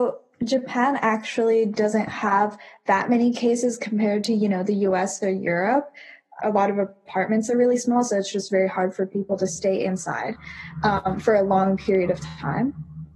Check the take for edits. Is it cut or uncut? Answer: cut